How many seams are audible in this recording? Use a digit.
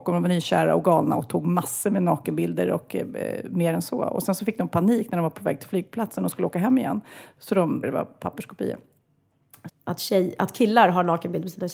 2